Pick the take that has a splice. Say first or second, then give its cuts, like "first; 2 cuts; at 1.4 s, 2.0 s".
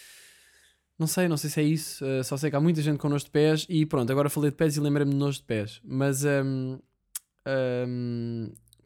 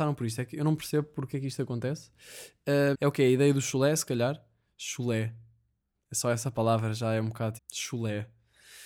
second; 2 cuts; at 2.9 s, 7.6 s